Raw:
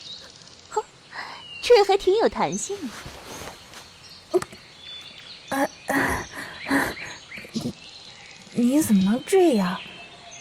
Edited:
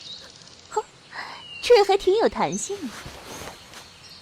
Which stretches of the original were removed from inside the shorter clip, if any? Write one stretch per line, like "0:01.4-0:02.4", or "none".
none